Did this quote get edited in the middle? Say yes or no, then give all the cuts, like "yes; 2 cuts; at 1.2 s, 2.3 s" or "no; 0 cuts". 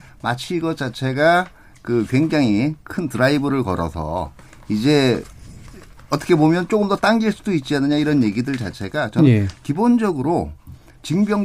no; 0 cuts